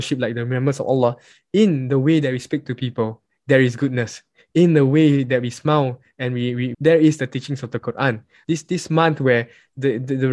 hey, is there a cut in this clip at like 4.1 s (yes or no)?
no